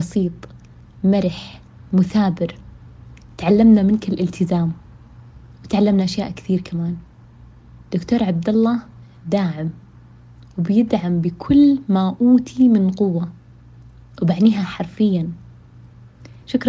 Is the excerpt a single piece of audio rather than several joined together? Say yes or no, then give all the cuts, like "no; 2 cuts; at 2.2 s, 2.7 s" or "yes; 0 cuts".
yes; 0 cuts